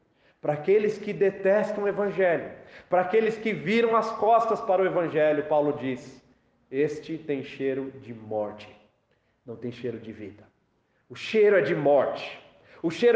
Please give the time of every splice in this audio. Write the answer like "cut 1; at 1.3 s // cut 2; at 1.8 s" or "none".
none